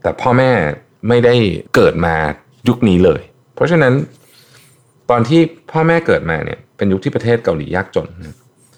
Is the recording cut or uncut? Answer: cut